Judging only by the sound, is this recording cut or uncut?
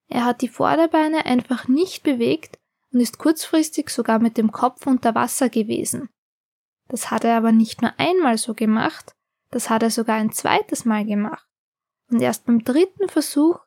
uncut